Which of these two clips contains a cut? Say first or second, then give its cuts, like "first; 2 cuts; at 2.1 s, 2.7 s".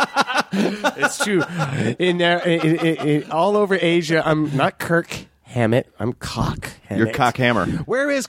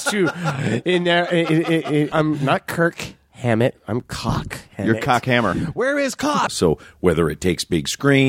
second; 2 cuts; at 2.1 s, 6.5 s